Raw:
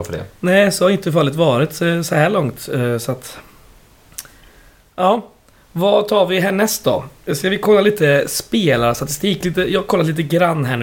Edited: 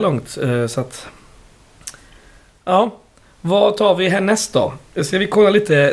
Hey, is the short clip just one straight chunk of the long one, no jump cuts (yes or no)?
yes